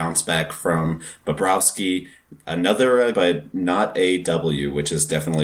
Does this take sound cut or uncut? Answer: cut